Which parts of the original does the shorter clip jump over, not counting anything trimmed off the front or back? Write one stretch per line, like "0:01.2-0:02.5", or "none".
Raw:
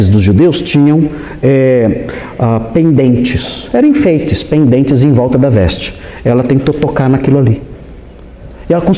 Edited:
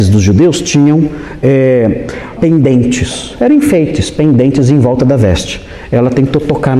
0:02.4-0:02.7